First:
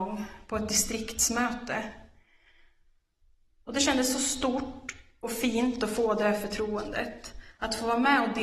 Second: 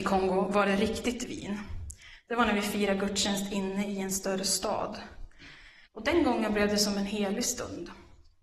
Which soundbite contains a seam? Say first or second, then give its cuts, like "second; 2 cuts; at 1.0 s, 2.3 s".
second; 1 cut; at 5.9 s